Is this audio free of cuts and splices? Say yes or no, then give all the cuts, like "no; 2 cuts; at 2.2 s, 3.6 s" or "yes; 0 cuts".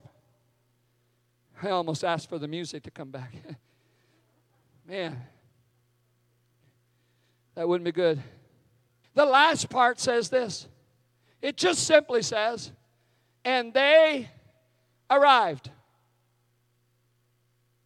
no; 1 cut; at 9.0 s